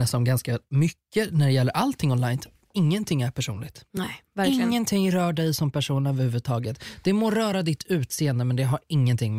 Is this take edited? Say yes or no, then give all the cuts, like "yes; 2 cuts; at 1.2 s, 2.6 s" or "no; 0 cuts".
no; 0 cuts